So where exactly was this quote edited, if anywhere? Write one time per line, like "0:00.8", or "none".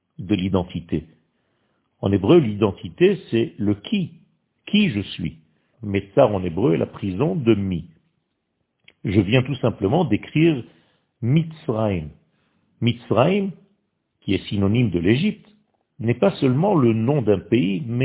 0:05.7